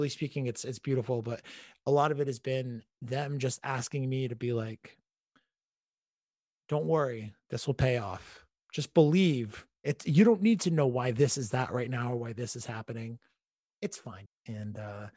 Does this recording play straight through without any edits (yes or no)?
no